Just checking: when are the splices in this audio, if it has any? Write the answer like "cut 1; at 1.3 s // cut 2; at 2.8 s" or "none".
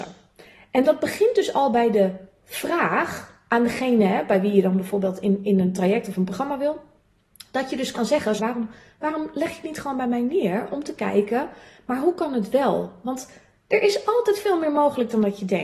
cut 1; at 8.4 s